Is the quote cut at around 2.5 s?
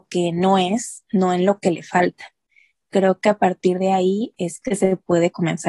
no; 0 cuts

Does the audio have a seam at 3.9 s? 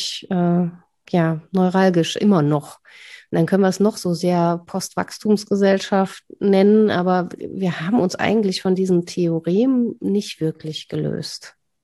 no; 0 cuts

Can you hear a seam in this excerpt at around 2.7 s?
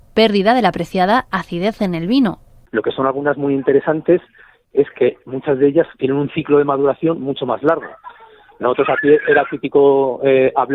yes; 1 cut; at 2.7 s

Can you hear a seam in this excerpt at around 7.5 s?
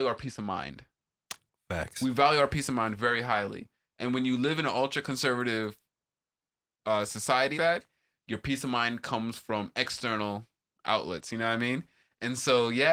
yes; 1 cut; at 7.5 s

